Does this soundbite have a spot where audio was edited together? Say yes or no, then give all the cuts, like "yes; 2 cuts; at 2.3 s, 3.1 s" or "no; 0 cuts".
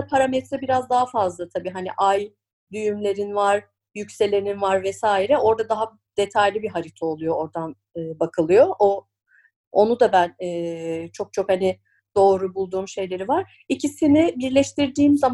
no; 0 cuts